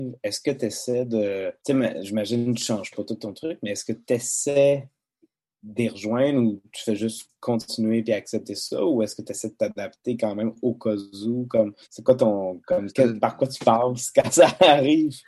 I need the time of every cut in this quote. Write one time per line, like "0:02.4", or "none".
0:01.6
0:11.8